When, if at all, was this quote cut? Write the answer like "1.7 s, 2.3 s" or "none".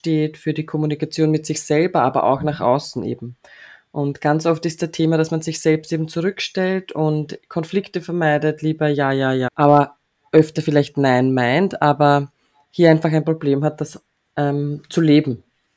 9.5 s

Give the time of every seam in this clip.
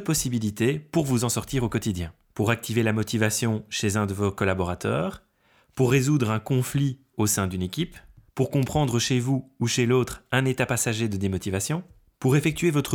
none

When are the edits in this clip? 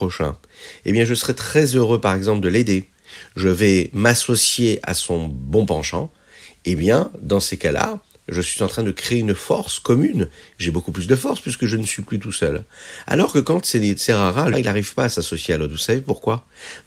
14.5 s

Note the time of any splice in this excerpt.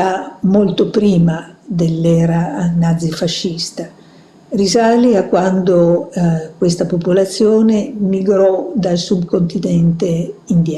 none

